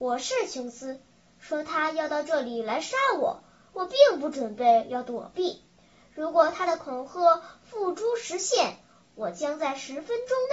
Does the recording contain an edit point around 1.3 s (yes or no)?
yes